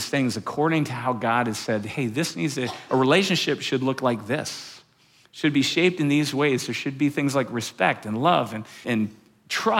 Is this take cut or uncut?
cut